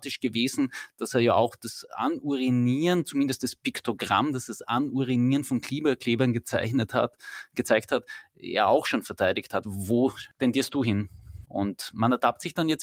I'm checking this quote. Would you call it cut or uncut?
cut